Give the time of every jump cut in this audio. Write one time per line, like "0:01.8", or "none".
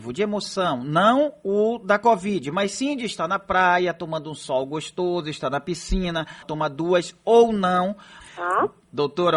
0:06.4
0:08.2